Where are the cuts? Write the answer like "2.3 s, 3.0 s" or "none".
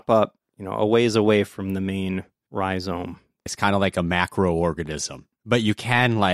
3.5 s, 5.3 s